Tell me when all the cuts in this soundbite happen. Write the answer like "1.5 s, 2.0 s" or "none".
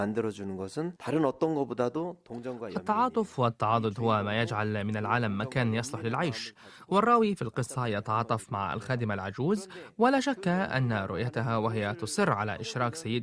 1.0 s